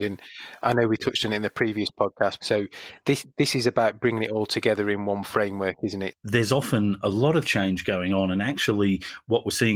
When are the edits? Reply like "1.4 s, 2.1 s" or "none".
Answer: 2.4 s, 6.1 s